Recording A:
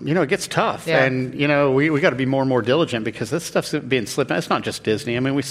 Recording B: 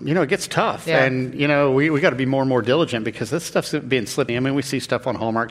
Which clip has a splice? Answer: B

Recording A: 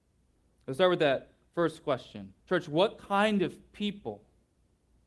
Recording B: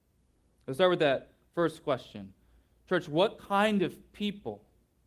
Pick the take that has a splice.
A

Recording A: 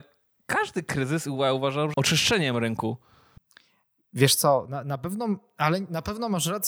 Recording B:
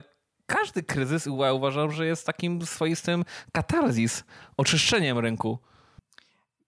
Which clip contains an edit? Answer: A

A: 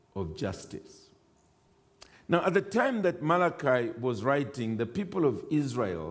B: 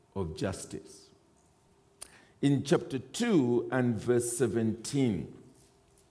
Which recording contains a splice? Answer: B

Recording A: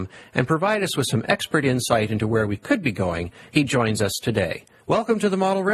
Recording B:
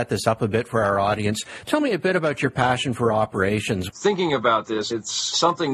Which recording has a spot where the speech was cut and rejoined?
B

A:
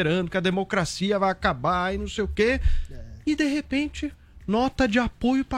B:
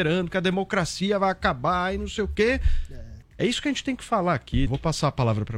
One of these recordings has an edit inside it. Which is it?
B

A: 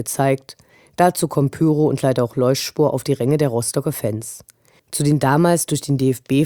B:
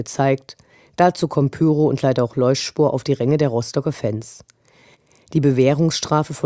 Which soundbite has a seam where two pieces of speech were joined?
A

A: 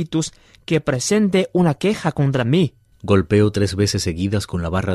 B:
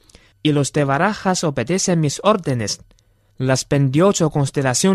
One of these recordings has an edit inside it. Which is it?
A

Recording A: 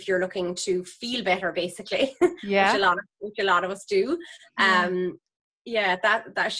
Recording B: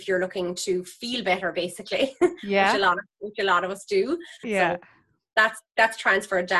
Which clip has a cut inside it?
B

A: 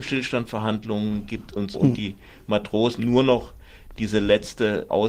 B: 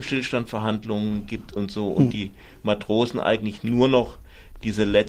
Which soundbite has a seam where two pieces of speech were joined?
A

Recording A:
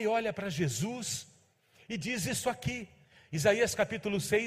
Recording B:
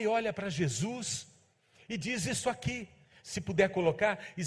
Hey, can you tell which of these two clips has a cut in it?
B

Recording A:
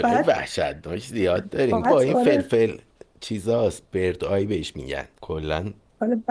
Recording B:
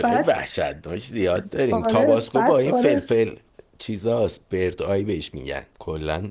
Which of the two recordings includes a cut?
A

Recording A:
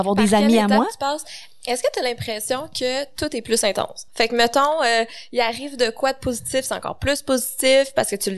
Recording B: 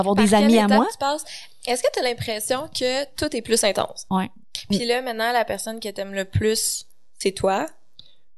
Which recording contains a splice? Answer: B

